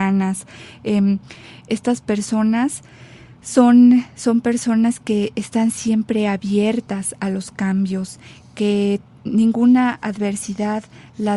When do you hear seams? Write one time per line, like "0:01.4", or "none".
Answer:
none